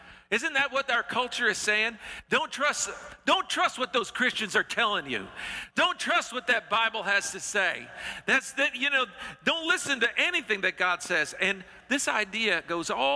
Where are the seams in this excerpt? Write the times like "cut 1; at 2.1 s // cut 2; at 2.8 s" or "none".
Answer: none